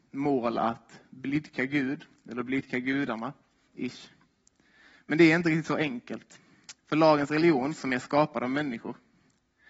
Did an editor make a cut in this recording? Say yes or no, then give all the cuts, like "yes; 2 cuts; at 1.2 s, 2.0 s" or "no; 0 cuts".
yes; 2 cuts; at 3.7 s, 6.8 s